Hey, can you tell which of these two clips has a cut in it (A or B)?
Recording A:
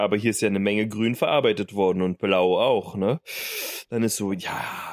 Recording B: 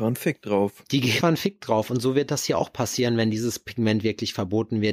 B